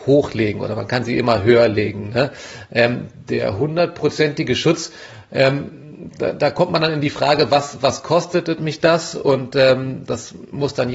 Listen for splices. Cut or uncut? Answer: uncut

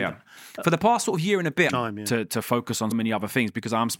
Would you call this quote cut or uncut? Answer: cut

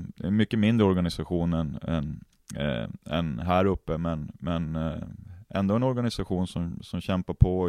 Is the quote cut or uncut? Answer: uncut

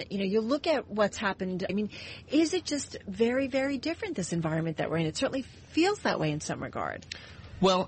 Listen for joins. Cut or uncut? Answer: cut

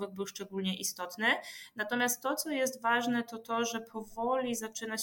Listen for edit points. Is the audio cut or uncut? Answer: uncut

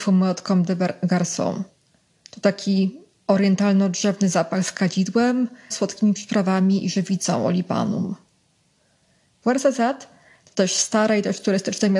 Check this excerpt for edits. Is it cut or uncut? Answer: cut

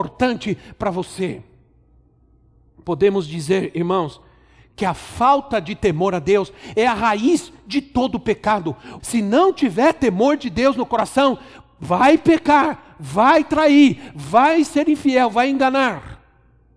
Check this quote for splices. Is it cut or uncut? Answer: cut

